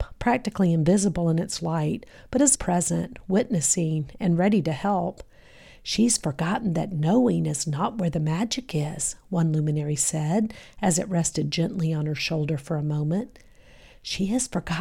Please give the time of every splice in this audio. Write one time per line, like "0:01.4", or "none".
0:02.6

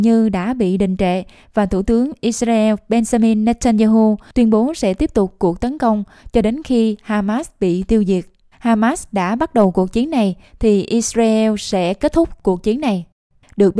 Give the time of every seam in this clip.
0:08.5

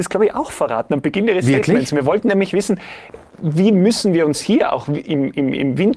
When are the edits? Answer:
none

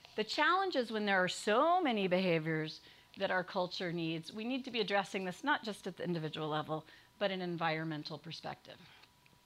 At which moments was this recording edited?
none

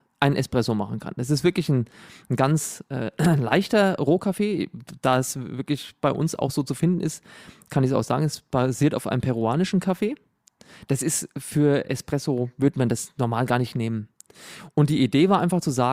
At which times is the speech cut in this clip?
none

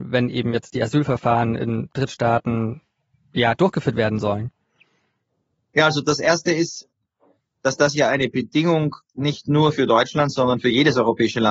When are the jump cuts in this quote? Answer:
none

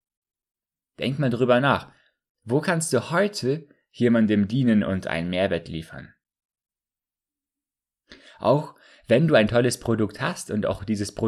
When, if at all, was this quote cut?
none

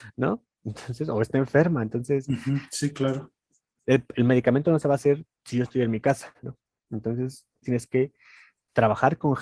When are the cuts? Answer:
0:06.4
0:07.6

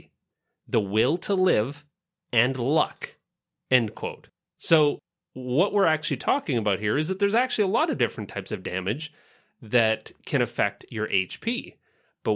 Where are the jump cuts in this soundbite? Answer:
none

